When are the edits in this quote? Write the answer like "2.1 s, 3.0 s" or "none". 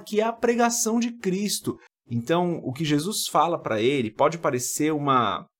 1.9 s